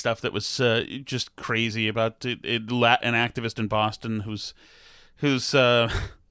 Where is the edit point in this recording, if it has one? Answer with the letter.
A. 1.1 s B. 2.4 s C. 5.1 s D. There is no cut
D